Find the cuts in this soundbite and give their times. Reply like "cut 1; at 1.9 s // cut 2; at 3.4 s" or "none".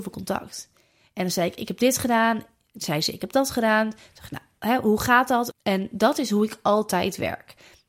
cut 1; at 5.5 s